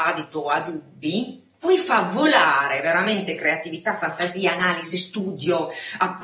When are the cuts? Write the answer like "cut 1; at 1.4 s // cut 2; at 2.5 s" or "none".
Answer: none